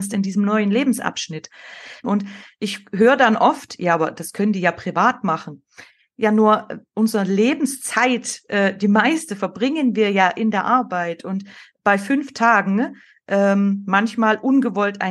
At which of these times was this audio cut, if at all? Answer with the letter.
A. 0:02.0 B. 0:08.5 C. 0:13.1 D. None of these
A